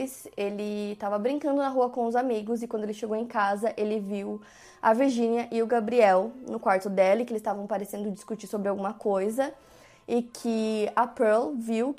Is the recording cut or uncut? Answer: uncut